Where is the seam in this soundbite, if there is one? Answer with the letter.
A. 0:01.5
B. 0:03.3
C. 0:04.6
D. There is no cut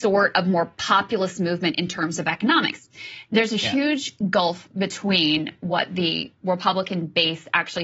B